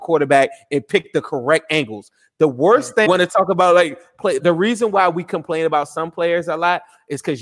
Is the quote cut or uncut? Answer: cut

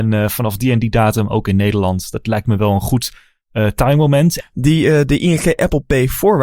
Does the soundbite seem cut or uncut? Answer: cut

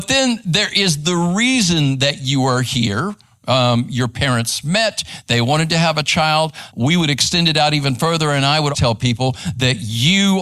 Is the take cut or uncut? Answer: cut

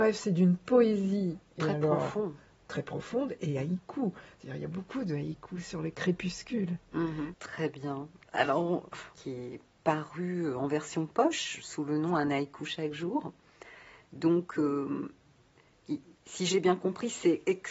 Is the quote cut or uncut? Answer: cut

